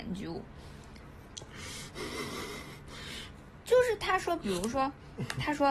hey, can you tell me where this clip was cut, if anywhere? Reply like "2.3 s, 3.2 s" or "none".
3.6 s